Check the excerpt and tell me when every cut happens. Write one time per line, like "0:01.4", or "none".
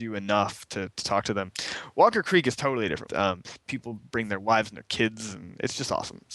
0:03.1

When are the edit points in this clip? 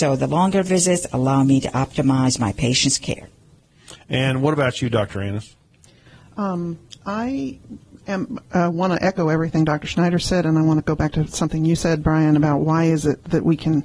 none

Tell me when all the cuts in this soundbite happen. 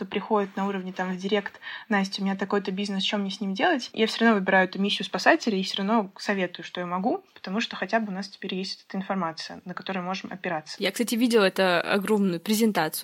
none

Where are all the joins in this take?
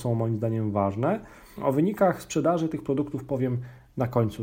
0:01.6

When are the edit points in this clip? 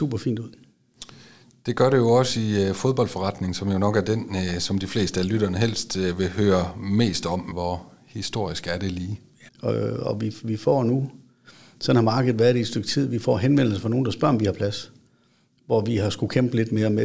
0:07.5
0:09.5

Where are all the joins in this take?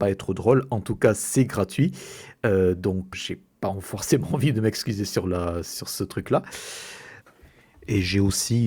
0:03.1

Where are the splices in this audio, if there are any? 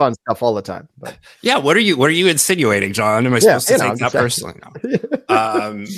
none

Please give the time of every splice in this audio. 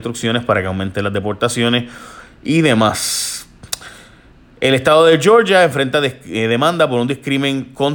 none

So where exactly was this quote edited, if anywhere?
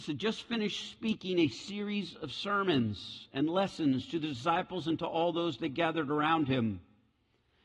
none

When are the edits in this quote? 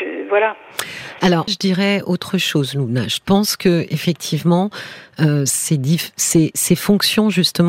0:01.5

